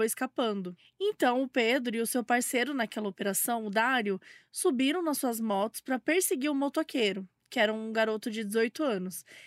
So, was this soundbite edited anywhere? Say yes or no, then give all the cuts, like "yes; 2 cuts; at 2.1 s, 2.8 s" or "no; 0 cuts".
no; 0 cuts